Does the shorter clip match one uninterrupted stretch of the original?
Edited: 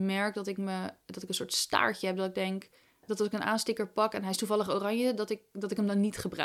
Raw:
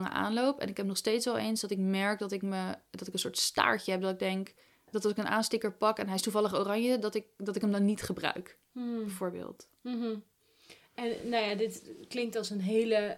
yes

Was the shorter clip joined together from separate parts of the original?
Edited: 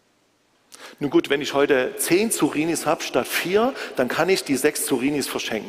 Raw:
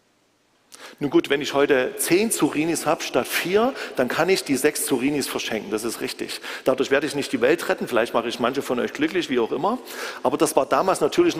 no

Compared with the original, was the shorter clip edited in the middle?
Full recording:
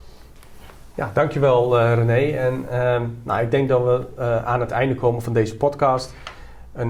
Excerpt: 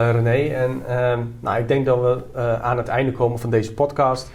no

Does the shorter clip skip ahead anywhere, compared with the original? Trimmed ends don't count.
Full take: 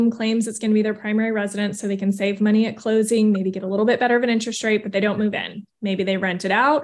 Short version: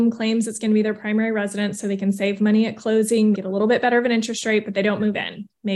yes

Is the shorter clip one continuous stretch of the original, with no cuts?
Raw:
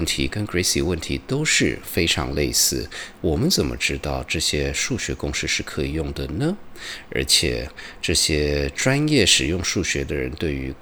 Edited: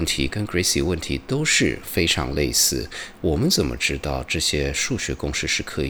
yes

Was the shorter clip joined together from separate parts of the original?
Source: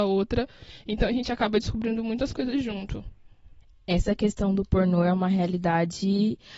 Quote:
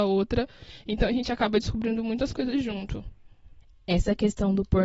no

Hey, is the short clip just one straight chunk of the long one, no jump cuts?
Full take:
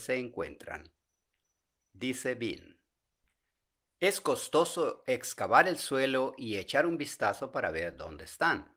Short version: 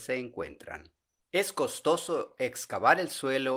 no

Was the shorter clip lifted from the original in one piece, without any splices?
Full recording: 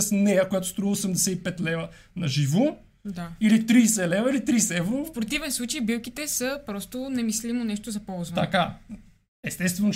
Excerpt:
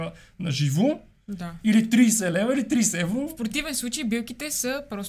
yes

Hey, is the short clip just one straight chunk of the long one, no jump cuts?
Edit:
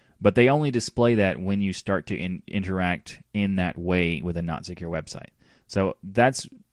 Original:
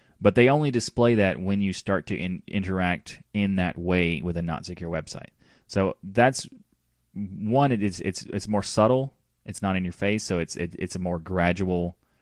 yes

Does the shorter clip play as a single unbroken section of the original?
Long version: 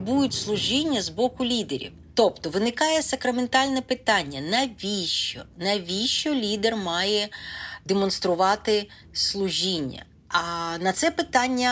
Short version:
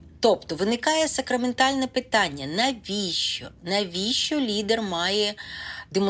yes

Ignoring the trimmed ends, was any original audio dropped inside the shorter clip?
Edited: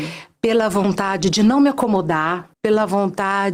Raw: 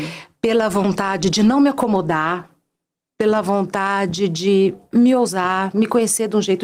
yes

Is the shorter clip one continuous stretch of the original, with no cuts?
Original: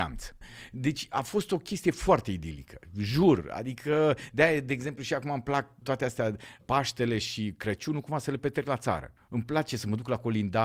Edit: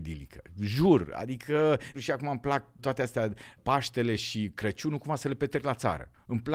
no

